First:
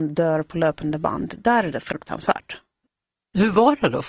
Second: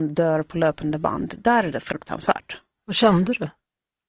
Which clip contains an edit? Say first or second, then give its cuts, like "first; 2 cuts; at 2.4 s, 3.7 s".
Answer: second; 1 cut; at 2.8 s